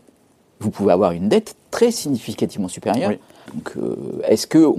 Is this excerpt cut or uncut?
cut